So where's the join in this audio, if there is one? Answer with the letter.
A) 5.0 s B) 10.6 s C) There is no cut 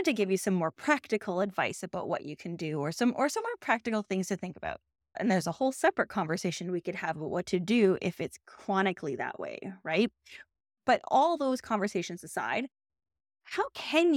A